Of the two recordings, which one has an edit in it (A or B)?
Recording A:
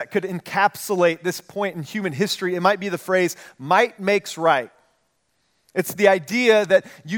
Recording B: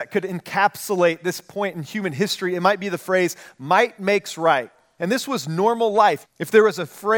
B